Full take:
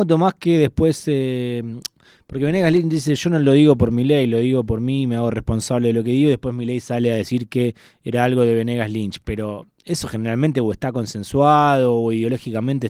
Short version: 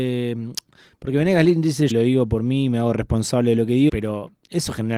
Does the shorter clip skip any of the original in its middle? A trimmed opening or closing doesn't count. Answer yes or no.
yes